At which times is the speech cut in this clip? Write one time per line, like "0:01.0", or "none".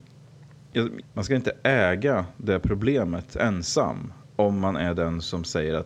0:01.0